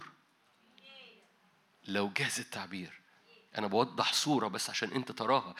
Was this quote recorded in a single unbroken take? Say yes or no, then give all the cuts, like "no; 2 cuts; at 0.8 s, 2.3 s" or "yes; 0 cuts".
yes; 0 cuts